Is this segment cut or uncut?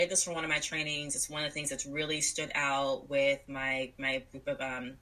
uncut